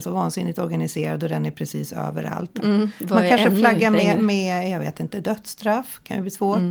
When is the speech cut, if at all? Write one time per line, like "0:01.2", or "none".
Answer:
0:02.6